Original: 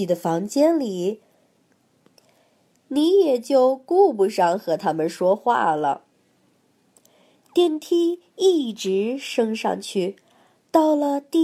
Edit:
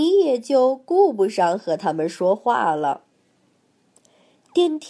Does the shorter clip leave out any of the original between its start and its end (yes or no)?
no